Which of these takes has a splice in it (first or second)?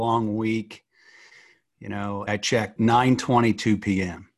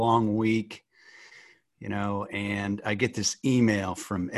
first